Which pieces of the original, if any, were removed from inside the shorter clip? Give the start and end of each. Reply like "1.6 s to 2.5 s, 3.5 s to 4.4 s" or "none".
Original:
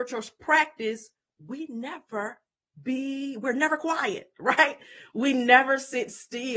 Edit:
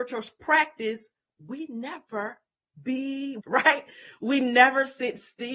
3.4 s to 4.3 s